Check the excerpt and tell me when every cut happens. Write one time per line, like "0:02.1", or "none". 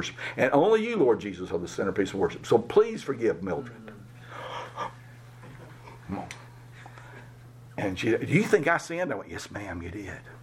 none